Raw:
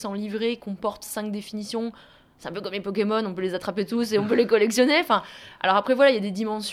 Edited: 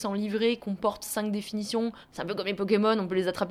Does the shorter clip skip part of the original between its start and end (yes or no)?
yes